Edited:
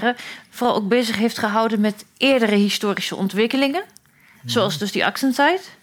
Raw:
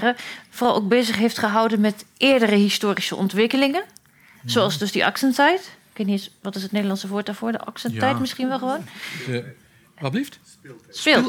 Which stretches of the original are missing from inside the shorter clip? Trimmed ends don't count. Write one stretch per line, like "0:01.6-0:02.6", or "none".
none